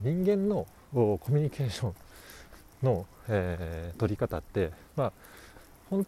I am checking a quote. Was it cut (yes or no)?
no